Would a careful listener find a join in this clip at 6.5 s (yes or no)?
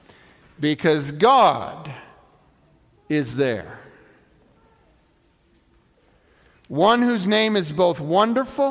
yes